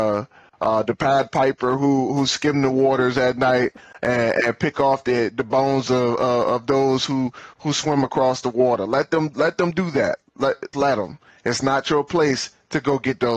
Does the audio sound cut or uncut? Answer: cut